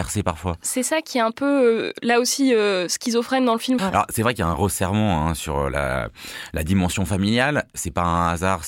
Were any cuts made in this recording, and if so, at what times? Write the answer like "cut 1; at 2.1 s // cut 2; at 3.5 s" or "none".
cut 1; at 3.8 s